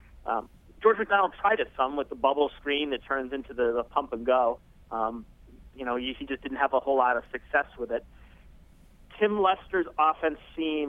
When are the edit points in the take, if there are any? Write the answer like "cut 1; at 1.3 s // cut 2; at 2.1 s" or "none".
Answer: none